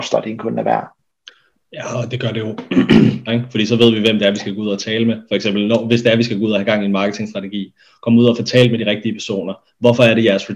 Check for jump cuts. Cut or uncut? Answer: cut